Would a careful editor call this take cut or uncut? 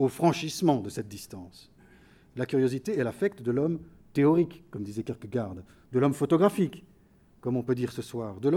uncut